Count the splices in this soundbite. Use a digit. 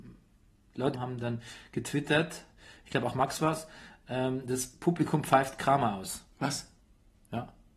1